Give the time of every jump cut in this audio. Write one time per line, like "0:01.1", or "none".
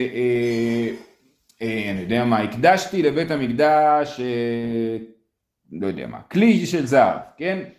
none